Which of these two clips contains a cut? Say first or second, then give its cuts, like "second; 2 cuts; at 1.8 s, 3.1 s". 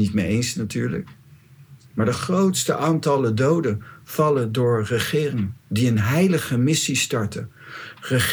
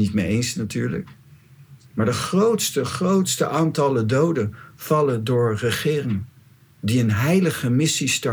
first; 2 cuts; at 2.1 s, 5.6 s